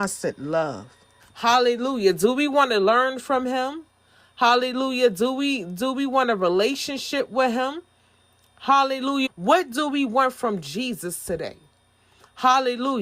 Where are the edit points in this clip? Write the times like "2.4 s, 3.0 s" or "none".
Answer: 1.2 s, 9.3 s